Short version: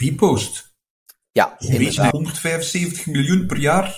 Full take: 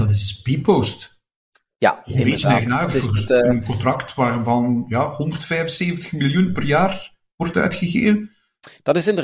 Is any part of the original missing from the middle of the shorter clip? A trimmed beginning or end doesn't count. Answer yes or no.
yes